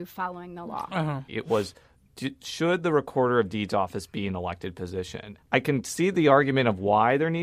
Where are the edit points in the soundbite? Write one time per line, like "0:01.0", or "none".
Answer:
0:01.3
0:05.4